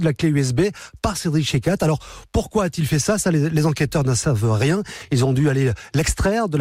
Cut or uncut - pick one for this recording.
uncut